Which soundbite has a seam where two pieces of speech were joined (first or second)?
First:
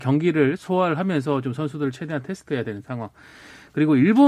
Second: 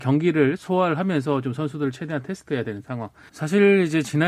second